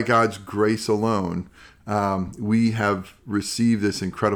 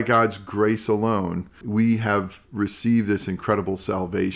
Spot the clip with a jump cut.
second; 1 cut; at 1.6 s

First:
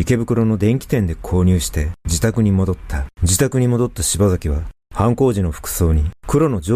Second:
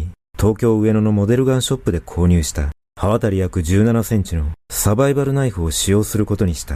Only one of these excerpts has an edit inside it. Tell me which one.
first; 1 cut; at 3.1 s

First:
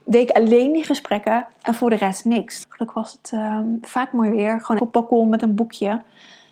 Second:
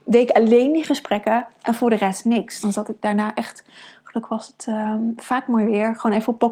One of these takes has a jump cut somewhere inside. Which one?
first; 2 cuts; at 2.6 s, 4.8 s

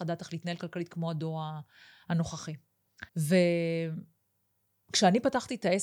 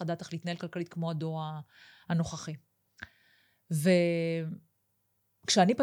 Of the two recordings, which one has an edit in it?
first; 1 cut; at 3.1 s

